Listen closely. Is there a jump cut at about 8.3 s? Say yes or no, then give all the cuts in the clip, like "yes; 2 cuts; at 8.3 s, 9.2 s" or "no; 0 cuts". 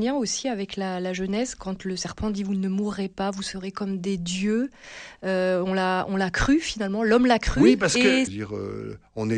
yes; 1 cut; at 8.3 s